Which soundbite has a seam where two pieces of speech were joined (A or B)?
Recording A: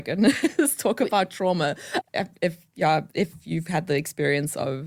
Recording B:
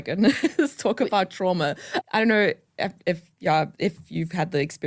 A